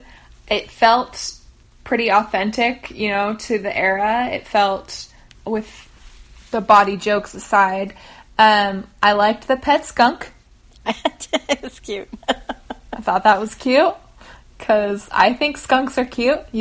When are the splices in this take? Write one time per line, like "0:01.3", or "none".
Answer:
none